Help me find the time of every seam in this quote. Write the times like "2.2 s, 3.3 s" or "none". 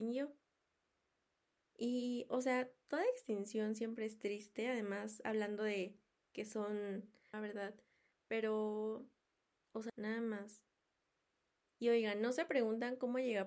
7.3 s, 9.9 s